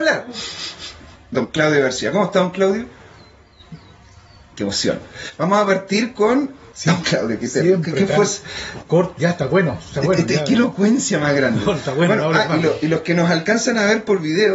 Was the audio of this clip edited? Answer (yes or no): yes